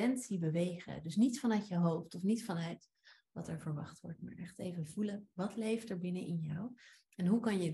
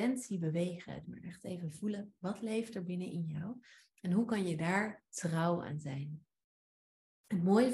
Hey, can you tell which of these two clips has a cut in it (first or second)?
second